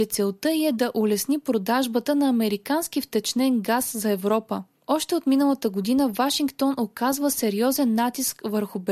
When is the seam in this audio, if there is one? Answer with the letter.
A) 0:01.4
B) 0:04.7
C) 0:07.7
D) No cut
D